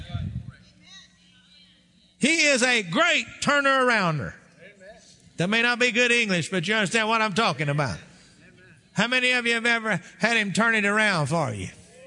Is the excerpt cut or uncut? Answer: uncut